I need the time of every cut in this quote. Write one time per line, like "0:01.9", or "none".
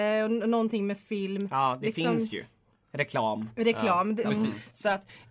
0:04.2